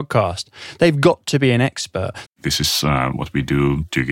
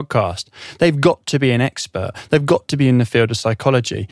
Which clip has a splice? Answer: first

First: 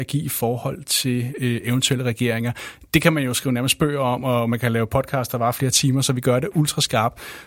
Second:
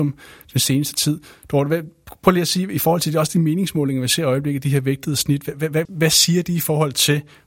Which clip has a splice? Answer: second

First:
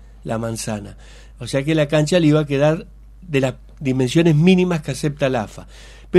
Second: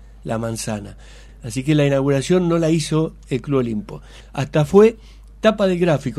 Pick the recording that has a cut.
second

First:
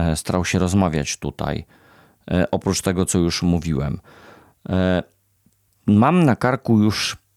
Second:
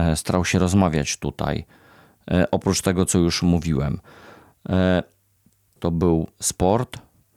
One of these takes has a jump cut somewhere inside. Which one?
second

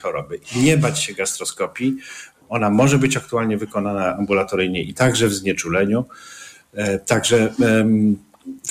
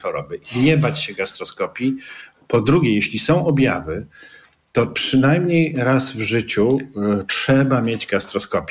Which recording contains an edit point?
second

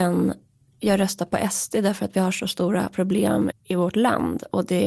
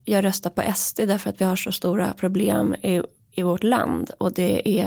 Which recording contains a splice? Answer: first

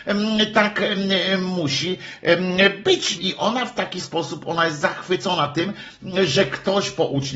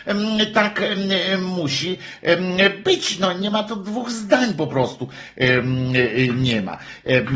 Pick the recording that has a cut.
first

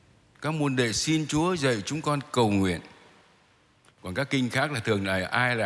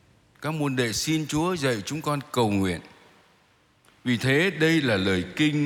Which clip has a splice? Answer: first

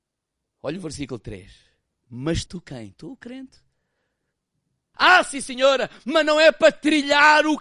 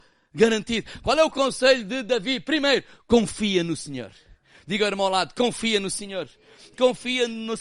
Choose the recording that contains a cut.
first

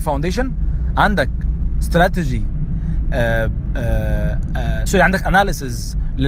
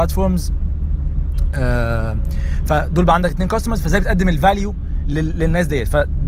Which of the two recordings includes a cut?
first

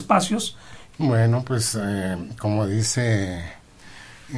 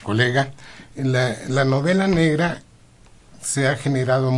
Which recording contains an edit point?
first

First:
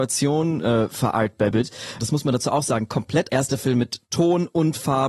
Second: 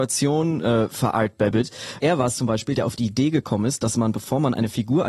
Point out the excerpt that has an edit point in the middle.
first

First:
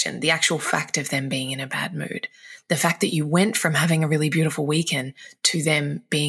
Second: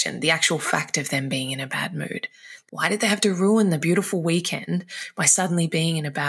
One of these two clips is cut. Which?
second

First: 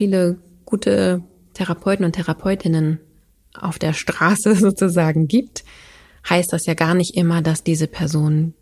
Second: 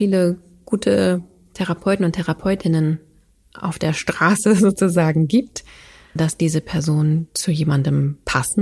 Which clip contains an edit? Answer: second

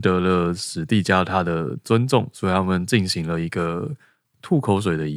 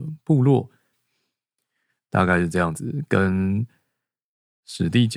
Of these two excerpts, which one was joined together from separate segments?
second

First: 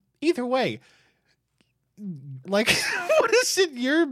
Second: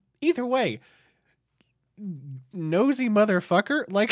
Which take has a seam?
first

